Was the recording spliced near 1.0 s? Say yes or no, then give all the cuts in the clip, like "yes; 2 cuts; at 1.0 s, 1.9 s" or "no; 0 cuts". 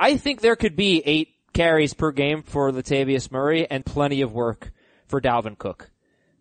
no; 2 cuts; at 2.4 s, 3.8 s